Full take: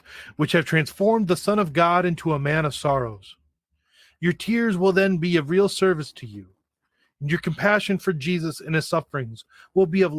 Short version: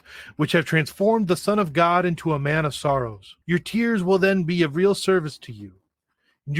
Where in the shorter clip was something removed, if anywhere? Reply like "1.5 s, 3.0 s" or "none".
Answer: 3.4 s